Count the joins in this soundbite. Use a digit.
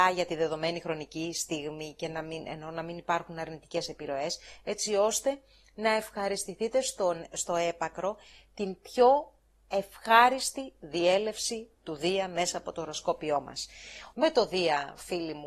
1